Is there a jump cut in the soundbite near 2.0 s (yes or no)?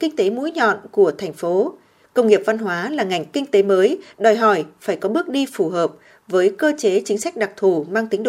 yes